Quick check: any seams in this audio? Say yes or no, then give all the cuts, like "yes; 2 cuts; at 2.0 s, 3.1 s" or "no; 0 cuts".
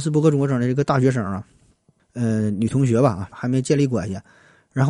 yes; 2 cuts; at 2.0 s, 3.3 s